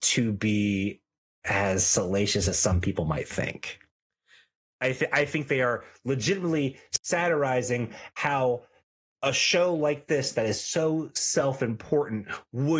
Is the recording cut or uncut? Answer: uncut